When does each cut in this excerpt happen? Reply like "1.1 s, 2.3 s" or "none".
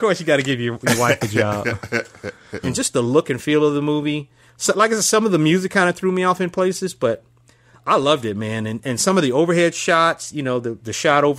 2.6 s